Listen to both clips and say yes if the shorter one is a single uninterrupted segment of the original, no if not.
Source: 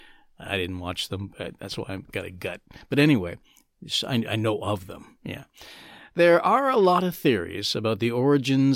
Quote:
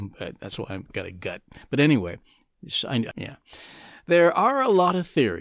no